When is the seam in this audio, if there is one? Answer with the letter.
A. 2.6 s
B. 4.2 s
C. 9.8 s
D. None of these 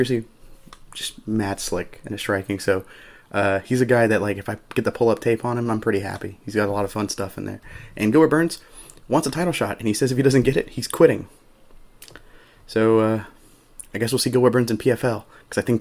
D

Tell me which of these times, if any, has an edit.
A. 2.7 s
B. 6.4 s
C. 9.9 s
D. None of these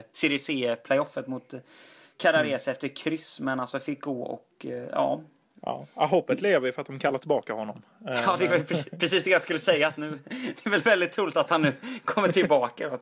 D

